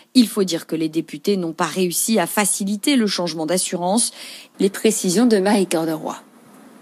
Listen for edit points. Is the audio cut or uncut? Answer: cut